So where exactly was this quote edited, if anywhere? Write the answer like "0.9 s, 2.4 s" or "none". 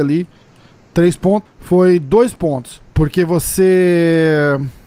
1.5 s, 2.9 s